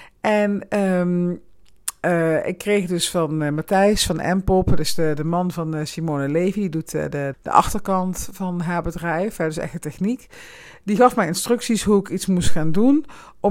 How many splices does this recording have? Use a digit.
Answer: 1